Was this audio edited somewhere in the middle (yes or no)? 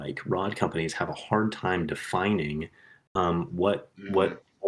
yes